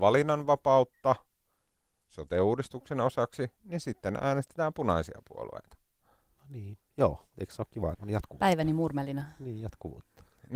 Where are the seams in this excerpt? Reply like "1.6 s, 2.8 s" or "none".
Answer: 6.8 s, 7.9 s